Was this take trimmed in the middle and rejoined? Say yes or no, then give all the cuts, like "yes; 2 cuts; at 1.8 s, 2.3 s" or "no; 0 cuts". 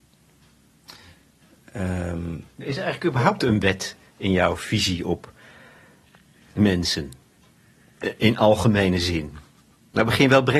no; 0 cuts